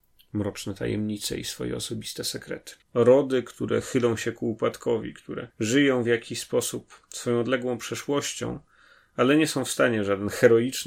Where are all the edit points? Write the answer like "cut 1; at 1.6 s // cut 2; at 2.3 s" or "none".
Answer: cut 1; at 2.8 s // cut 2; at 5.5 s